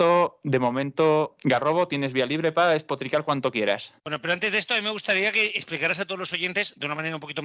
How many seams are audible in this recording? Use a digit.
1